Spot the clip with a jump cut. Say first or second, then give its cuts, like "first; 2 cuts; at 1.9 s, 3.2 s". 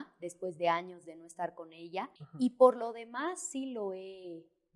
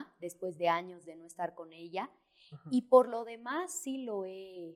first; 1 cut; at 2.2 s